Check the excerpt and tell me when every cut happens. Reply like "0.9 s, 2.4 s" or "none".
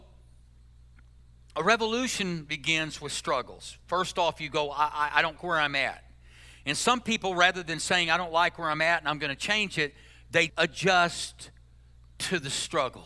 5.4 s, 10.5 s